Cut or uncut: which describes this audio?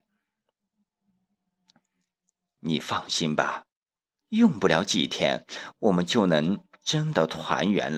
cut